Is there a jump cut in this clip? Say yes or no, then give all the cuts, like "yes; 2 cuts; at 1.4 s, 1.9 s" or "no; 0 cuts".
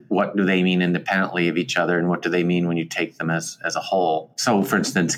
no; 0 cuts